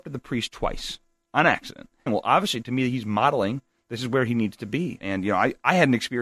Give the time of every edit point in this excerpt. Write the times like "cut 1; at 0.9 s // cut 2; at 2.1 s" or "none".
cut 1; at 2.1 s // cut 2; at 5.0 s